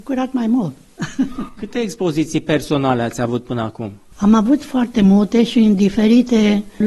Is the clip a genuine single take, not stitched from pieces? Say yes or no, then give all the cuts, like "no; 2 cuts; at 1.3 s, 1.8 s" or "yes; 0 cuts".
yes; 0 cuts